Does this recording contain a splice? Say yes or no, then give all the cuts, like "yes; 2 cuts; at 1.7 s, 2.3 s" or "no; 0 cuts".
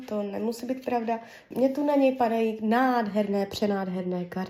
yes; 1 cut; at 1.5 s